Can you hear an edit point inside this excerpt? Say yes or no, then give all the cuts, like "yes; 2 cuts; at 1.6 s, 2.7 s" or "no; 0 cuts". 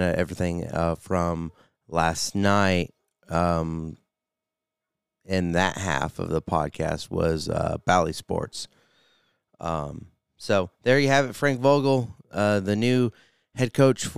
no; 0 cuts